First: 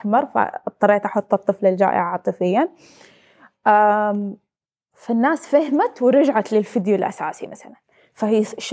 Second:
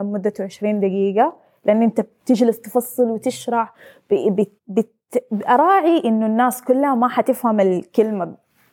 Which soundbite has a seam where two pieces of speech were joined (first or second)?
second